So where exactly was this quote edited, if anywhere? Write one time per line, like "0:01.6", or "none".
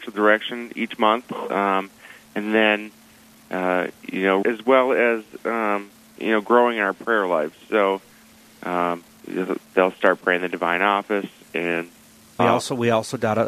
0:04.4
0:12.4